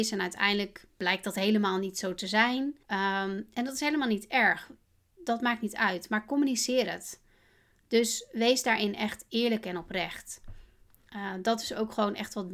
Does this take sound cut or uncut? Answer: cut